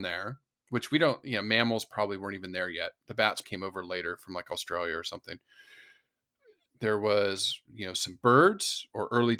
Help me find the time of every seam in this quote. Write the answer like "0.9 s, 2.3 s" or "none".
3.4 s, 6.7 s